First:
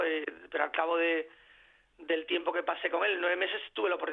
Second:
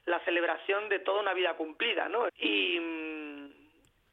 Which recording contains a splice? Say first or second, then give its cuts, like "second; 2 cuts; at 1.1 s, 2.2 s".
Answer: second; 1 cut; at 2.3 s